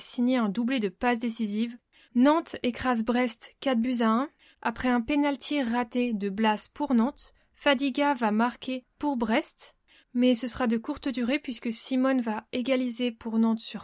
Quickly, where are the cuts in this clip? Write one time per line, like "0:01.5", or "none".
none

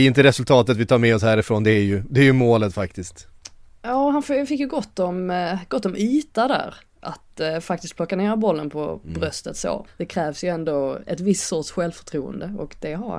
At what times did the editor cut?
0:09.9

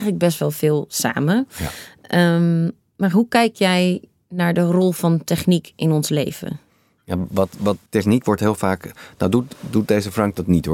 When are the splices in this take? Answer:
0:07.9

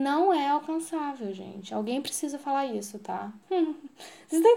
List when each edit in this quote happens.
0:03.4

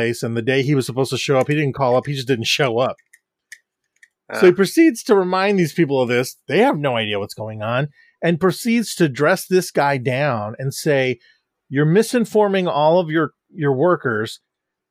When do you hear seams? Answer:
none

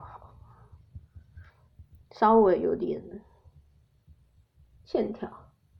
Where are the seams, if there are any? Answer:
none

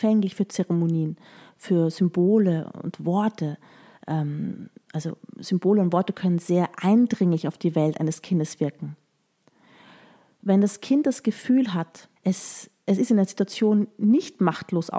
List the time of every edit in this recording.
0:12.2

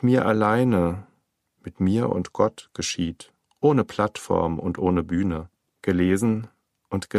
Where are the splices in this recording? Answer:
0:05.8

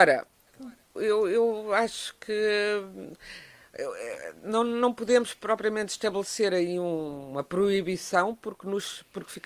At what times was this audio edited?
0:01.0

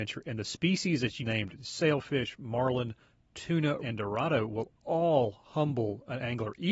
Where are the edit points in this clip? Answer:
0:01.2
0:03.8

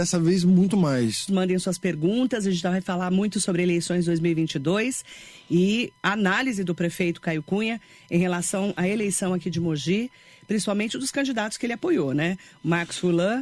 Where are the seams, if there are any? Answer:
0:01.3

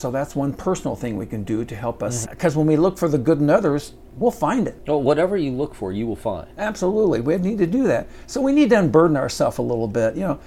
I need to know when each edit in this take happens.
0:02.2

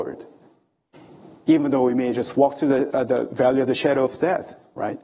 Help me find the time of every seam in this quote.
0:02.9

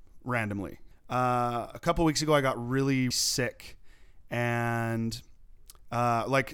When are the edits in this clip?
0:00.9
0:03.1

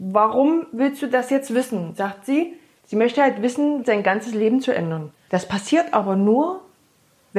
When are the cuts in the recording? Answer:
0:03.8
0:05.3

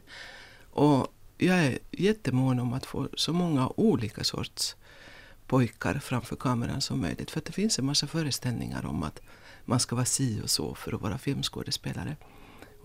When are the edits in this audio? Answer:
none

